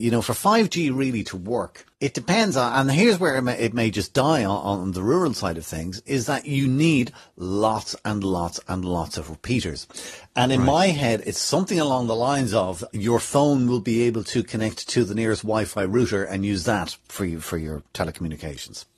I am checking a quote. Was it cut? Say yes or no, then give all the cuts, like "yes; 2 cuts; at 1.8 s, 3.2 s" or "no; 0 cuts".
yes; 1 cut; at 1.9 s